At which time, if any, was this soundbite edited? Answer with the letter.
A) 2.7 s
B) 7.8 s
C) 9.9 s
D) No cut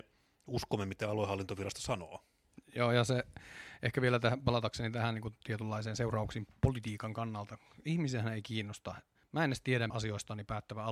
C